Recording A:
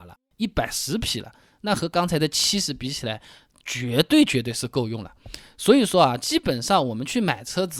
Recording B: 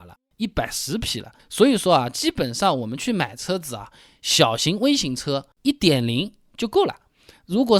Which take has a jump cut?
B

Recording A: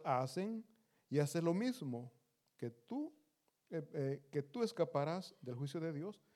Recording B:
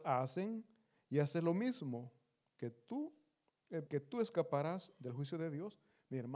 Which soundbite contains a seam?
B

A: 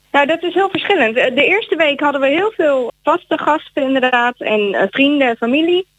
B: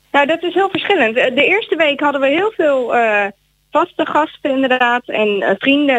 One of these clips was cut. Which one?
A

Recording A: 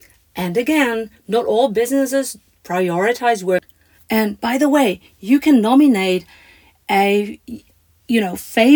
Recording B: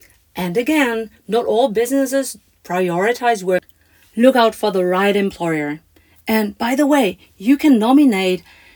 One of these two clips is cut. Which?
A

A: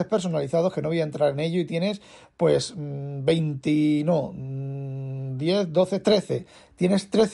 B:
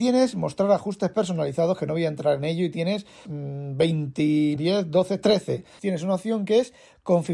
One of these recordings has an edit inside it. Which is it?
B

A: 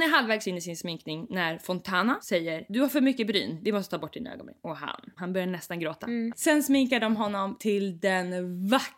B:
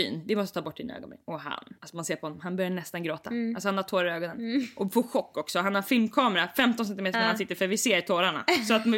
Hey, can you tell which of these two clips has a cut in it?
A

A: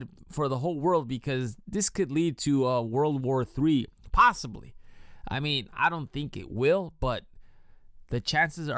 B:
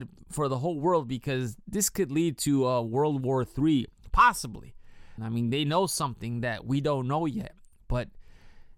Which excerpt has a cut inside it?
B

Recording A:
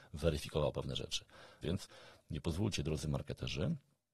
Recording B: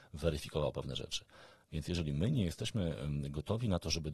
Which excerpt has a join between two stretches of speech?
A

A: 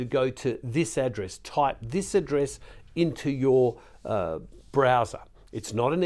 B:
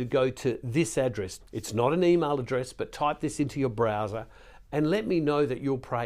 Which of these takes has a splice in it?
B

